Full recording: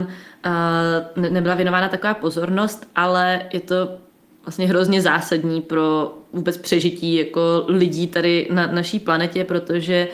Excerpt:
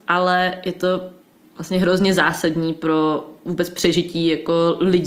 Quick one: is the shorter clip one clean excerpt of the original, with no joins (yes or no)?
yes